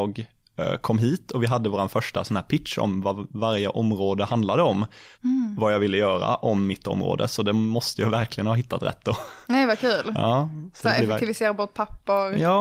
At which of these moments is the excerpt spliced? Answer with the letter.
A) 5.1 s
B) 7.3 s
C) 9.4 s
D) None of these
A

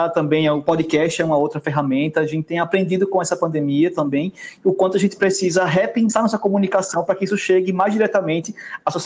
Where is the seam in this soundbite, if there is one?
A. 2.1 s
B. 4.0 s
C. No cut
C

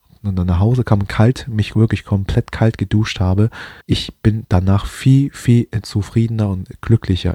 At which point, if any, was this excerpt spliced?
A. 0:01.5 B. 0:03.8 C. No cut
B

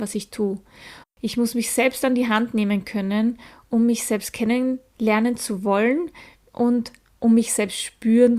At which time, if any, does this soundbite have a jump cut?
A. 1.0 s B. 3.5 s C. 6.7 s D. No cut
A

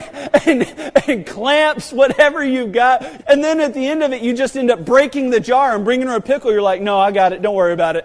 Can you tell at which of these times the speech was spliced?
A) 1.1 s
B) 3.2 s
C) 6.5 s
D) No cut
B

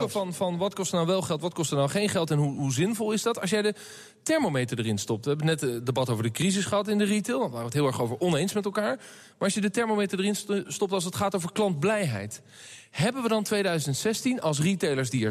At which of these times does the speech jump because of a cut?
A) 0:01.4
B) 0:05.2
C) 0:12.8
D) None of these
D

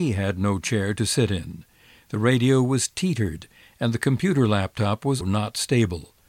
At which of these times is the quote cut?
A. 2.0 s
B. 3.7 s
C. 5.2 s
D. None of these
C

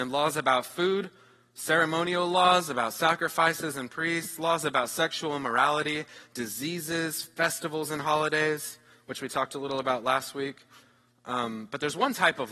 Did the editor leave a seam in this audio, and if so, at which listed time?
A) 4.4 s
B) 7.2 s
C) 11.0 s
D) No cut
D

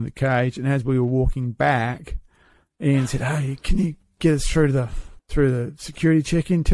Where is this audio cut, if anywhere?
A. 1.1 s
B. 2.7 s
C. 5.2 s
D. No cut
C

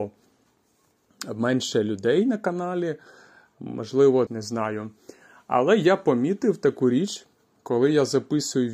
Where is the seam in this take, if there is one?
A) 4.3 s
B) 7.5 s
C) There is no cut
A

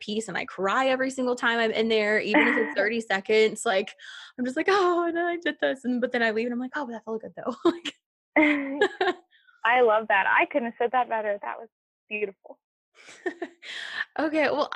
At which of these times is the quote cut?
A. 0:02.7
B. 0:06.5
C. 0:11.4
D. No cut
A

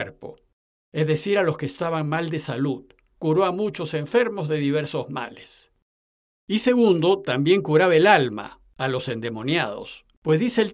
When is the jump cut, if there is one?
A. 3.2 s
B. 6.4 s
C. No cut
A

